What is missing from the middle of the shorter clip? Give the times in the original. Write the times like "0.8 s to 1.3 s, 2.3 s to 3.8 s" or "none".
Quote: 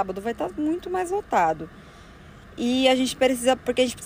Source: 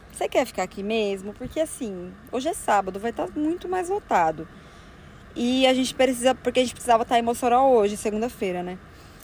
none